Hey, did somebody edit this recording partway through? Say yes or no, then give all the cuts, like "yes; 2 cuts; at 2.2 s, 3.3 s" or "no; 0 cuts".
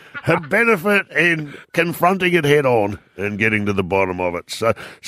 yes; 1 cut; at 1.6 s